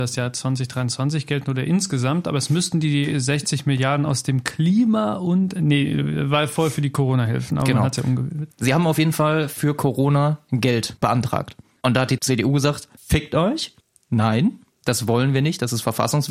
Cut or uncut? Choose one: cut